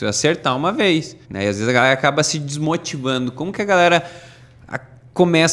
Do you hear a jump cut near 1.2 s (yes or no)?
yes